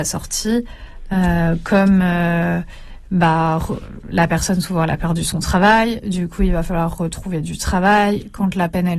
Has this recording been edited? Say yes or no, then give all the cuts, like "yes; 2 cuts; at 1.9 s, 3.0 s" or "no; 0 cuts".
no; 0 cuts